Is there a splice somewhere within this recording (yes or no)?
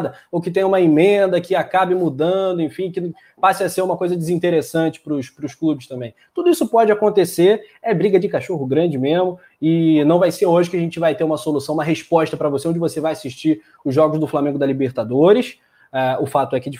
no